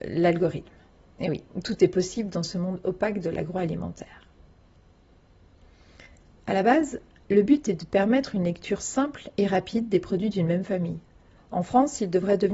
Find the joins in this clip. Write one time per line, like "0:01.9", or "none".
0:11.4